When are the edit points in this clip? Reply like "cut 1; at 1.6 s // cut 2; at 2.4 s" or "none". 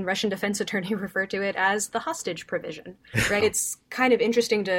cut 1; at 3.4 s